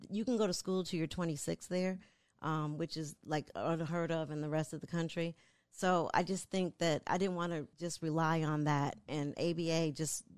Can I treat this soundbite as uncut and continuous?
no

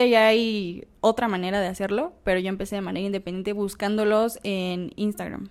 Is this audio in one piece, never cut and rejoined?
yes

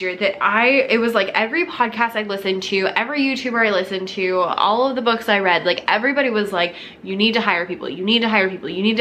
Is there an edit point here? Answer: no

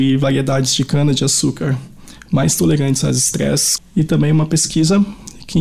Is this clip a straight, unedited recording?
no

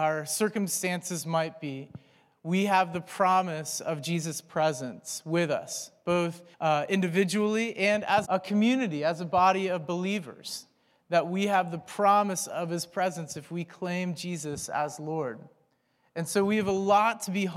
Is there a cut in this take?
yes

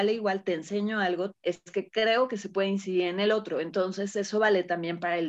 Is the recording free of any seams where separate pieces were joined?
no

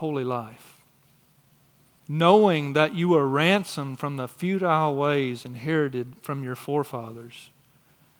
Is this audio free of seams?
no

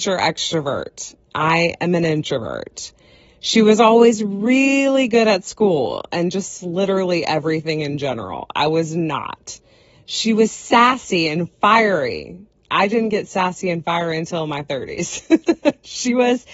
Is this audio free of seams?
yes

